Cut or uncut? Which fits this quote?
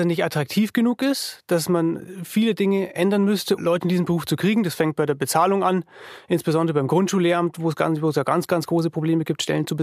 cut